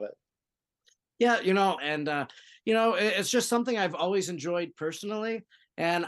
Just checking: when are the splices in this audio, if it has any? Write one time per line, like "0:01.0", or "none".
0:01.8